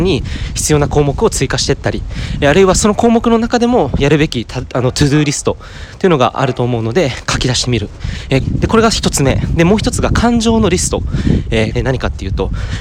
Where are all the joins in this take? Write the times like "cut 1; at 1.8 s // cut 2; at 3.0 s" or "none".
cut 1; at 8.4 s // cut 2; at 11.7 s